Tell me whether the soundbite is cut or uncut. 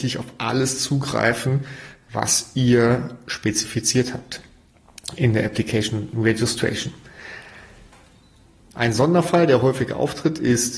cut